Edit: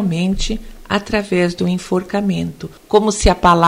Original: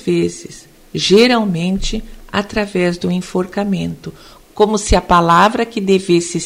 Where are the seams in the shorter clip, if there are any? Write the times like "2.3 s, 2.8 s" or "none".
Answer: 2.8 s